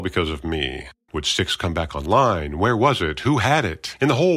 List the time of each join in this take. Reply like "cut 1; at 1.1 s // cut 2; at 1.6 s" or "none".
cut 1; at 1.1 s